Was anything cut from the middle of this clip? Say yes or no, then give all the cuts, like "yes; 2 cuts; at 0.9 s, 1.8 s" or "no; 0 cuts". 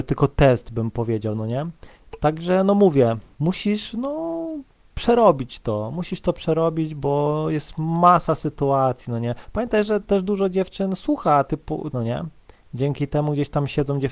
yes; 2 cuts; at 3.3 s, 11.9 s